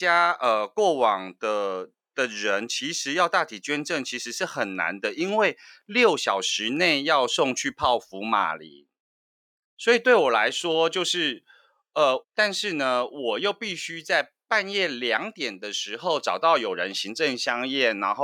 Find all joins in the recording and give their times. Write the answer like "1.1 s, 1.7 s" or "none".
12.2 s